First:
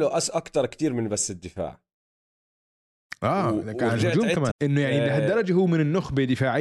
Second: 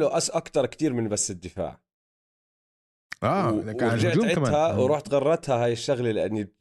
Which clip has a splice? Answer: first; 1 cut; at 4.5 s

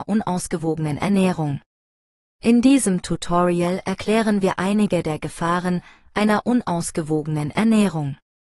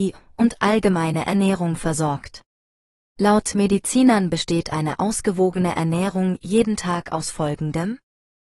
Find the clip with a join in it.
first; 1 cut; at 2.3 s

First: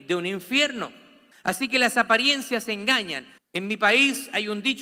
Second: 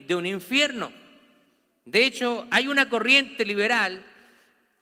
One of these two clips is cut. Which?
first; 2 cuts; at 1.3 s, 3.4 s

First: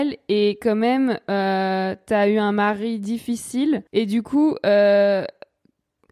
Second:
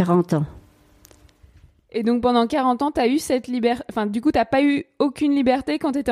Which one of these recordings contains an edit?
first; 1 cut; at 3.9 s

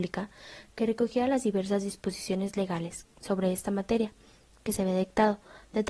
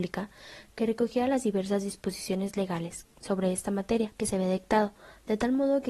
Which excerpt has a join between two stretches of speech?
second; 1 cut; at 4.2 s

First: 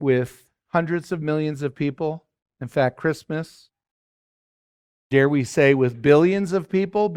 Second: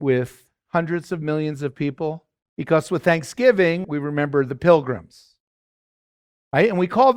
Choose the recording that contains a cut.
second; 2 cuts; at 2.5 s, 3.8 s

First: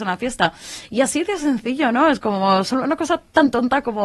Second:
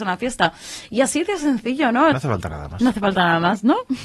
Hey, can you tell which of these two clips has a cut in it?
second; 1 cut; at 2.1 s

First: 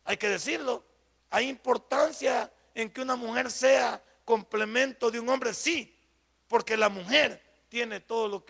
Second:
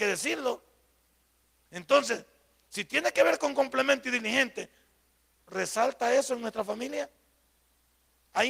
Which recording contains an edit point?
first; 1 cut; at 1.2 s

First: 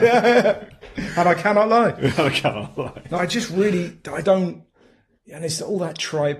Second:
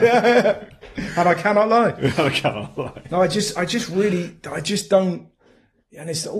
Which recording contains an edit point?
first; 2 cuts; at 3.2 s, 4.2 s

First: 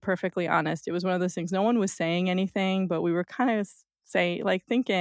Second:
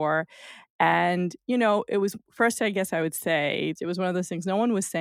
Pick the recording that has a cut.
second; 1 cut; at 3.8 s

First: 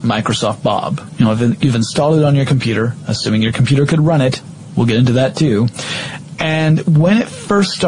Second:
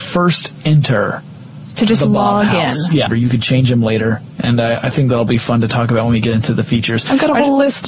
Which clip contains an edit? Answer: second; 1 cut; at 3.1 s

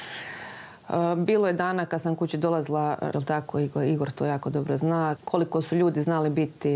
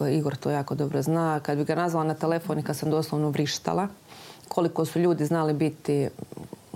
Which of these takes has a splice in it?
first; 2 cuts; at 3.1 s, 5.2 s

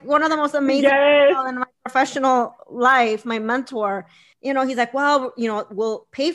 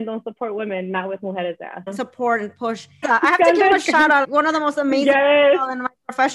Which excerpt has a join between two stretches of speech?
second; 3 cuts; at 1.9 s, 3.0 s, 4.2 s

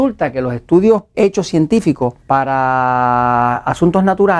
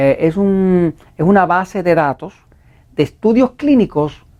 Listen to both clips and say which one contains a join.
first; 2 cuts; at 1.1 s, 2.2 s

